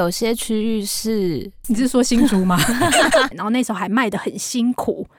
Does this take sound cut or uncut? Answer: cut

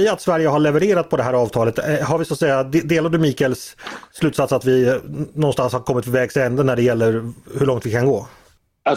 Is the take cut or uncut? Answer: uncut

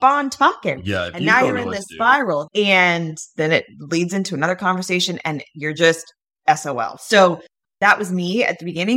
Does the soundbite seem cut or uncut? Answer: cut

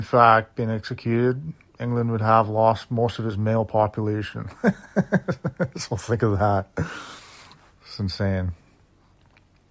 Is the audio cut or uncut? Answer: uncut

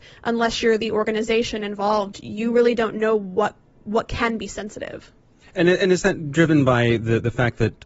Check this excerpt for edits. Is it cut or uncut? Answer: uncut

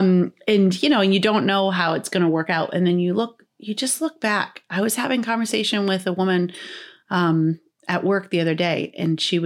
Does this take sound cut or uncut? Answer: uncut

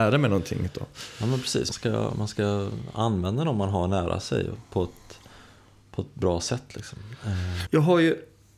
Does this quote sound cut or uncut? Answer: cut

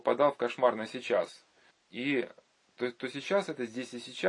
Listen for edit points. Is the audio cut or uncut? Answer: cut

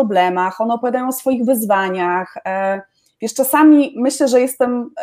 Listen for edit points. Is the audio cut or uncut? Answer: uncut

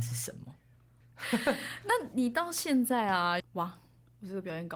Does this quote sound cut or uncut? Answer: cut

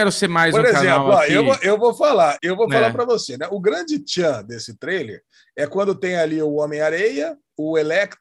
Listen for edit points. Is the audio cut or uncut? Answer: cut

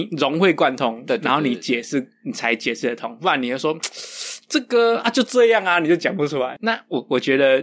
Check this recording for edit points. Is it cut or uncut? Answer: cut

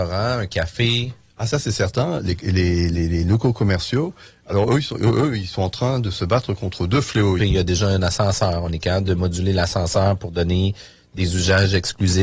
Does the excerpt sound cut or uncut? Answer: cut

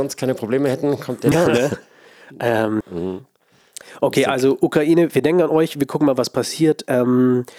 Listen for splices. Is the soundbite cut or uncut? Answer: cut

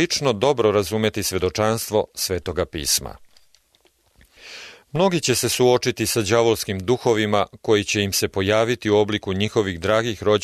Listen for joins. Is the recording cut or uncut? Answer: uncut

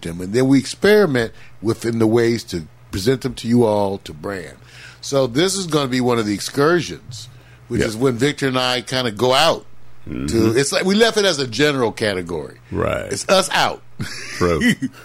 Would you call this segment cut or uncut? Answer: uncut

